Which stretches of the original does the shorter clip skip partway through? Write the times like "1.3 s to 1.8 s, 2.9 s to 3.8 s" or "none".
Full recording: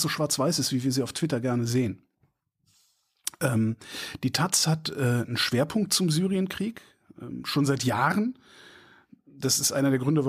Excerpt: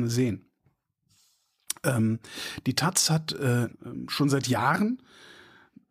5.3 s to 7.1 s